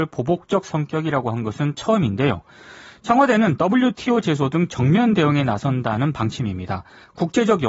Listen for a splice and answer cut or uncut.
uncut